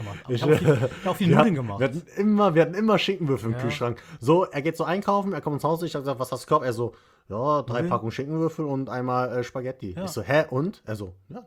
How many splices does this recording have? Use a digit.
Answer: 0